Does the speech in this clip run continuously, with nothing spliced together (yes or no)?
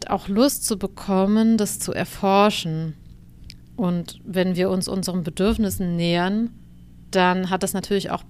no